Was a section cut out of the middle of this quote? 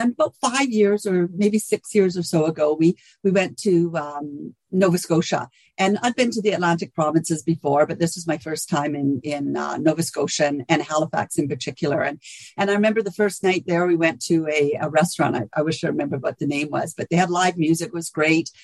no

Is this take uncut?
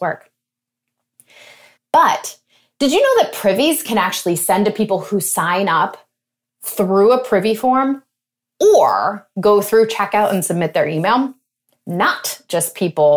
no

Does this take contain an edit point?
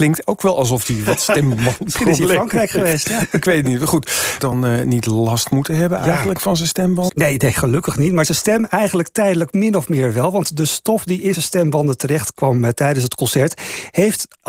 yes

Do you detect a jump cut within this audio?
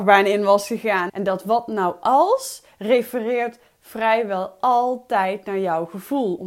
yes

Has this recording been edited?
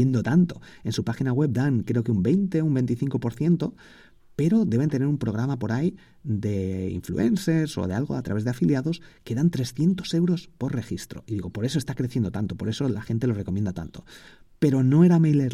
no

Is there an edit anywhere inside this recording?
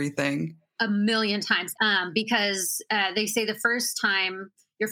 yes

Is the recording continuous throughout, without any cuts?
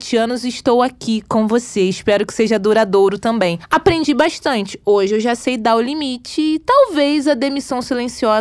yes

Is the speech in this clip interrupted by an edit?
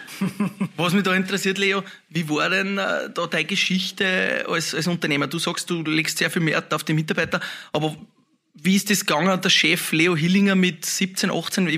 no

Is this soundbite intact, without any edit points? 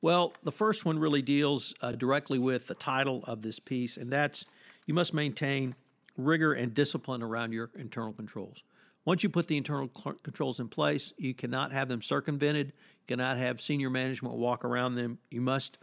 yes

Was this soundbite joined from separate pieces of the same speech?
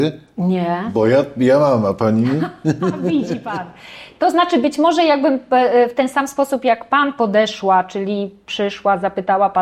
no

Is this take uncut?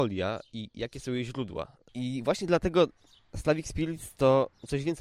no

